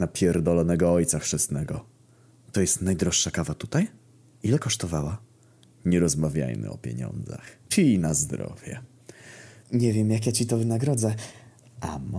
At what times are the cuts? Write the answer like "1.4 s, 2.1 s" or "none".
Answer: 7.6 s, 9.6 s